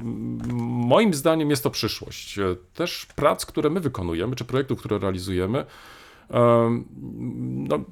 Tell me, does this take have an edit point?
no; 0 cuts

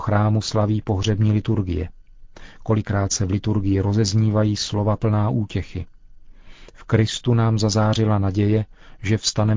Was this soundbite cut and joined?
no; 0 cuts

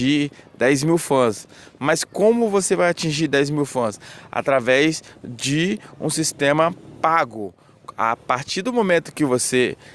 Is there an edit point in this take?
no; 0 cuts

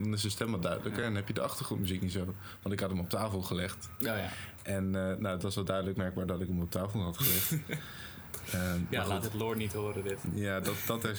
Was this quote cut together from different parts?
no; 0 cuts

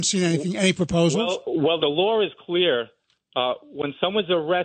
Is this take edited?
yes; 1 cut; at 1.8 s

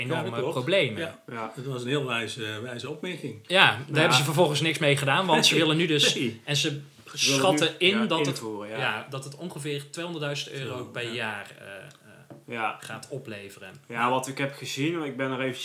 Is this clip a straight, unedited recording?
yes; 0 cuts

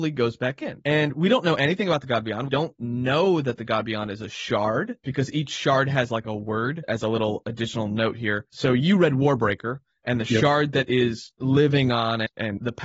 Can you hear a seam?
no; 0 cuts

